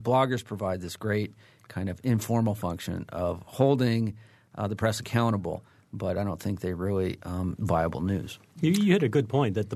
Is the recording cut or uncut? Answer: cut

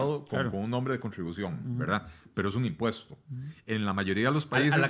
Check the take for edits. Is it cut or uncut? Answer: uncut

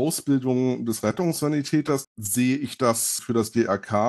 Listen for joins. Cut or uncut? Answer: cut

